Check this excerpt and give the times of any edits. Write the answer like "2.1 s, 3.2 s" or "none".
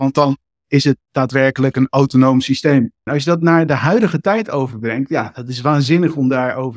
3.1 s